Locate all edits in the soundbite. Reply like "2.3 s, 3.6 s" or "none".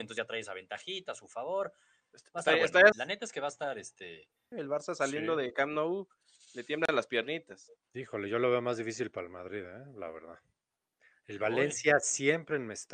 2.9 s, 4.5 s